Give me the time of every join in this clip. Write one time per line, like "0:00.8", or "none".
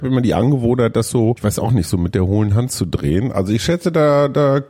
none